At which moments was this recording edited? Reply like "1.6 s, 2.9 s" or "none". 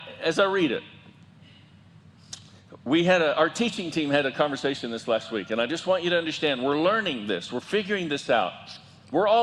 none